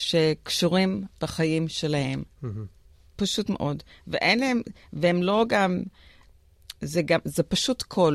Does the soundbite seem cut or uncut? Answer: cut